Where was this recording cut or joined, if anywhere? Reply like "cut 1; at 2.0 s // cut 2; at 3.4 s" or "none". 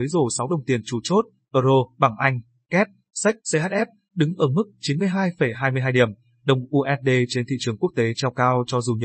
cut 1; at 1.9 s // cut 2; at 3.4 s